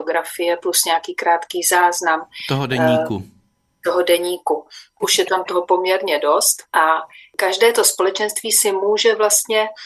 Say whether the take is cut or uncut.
cut